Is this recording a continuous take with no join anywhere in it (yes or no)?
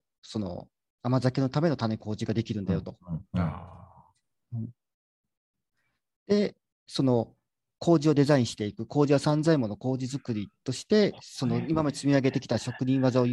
yes